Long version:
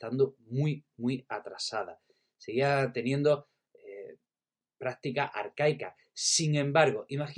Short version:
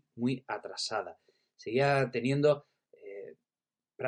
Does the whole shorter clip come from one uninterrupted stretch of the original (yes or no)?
yes